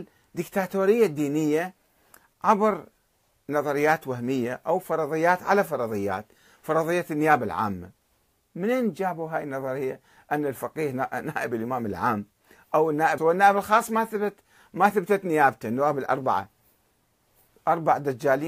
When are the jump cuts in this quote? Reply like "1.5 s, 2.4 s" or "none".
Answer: 13.2 s